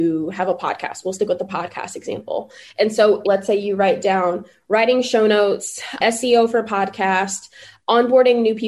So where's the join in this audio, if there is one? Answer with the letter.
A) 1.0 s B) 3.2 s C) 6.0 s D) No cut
B